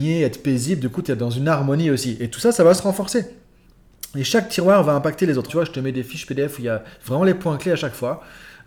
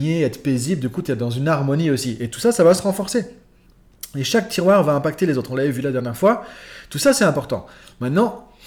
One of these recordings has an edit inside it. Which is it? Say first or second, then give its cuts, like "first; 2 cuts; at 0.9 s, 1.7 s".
first; 1 cut; at 5.5 s